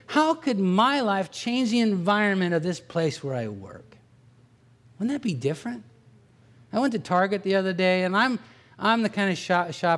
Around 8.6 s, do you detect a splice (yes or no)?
no